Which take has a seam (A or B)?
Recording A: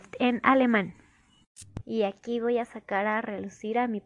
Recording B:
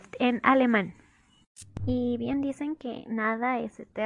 A